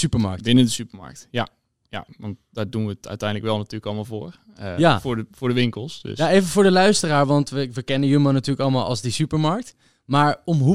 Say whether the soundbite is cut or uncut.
uncut